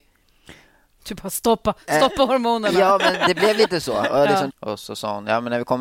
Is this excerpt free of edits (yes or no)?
no